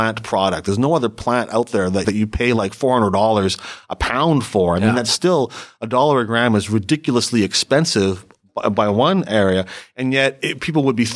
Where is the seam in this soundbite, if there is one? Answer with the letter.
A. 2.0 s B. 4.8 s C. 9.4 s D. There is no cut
A